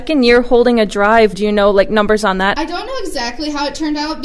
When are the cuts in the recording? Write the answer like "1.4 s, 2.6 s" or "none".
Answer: 1.3 s, 2.6 s